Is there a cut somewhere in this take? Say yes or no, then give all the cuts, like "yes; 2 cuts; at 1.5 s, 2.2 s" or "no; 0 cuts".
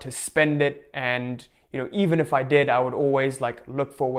no; 0 cuts